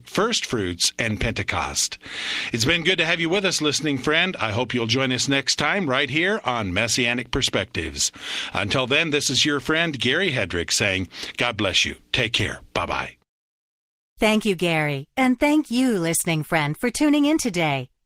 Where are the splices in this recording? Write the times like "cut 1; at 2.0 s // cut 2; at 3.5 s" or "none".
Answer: none